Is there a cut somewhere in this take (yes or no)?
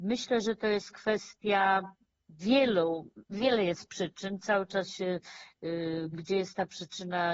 yes